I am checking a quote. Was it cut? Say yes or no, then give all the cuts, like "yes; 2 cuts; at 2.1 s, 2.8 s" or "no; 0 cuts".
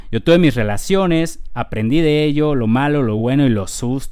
no; 0 cuts